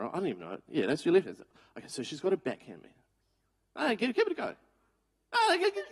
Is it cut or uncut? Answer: uncut